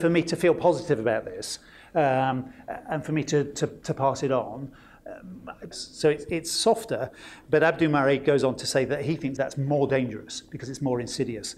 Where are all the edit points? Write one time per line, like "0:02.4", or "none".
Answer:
0:05.7
0:09.4